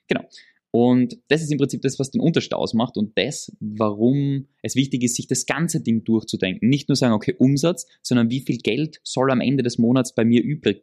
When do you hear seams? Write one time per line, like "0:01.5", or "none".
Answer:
none